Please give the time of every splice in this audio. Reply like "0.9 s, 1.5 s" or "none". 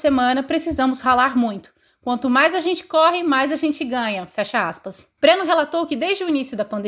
5.2 s

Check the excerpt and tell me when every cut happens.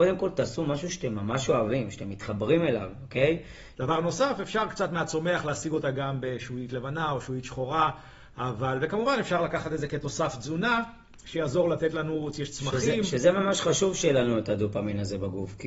3.8 s

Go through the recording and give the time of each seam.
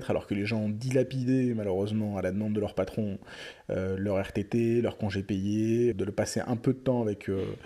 5.9 s

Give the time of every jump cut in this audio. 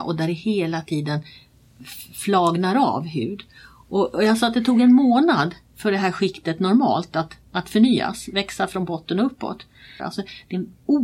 10.0 s

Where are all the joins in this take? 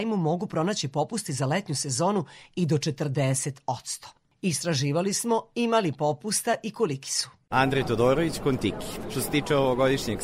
none

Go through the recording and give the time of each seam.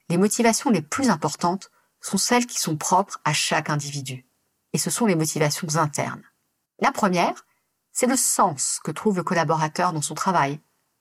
6.6 s

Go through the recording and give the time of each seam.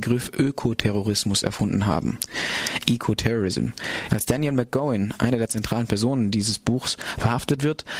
4.1 s

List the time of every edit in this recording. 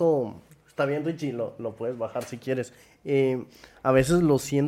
none

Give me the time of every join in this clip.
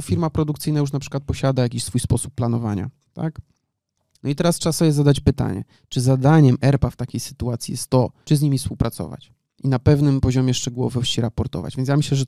4.2 s, 8.2 s

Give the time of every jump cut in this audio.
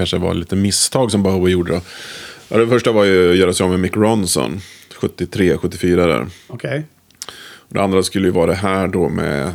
none

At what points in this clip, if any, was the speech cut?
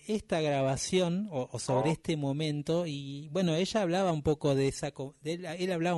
none

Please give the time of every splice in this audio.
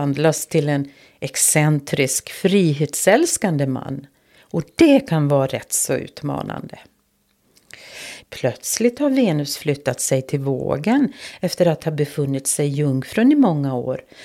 8.2 s

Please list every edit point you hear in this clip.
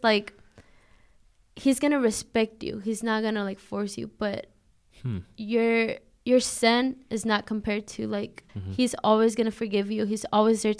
8.5 s

